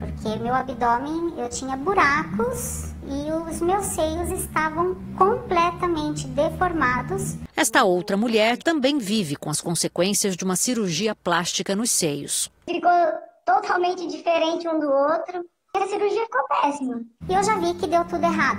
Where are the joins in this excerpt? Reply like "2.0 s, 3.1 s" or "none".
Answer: 8.6 s, 17.2 s